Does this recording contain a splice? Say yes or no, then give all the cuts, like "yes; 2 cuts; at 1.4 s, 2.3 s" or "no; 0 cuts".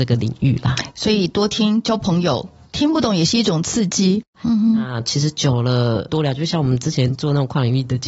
yes; 2 cuts; at 4.3 s, 6.1 s